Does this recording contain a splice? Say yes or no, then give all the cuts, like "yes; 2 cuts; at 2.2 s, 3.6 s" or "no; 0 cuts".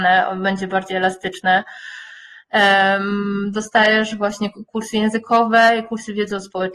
no; 0 cuts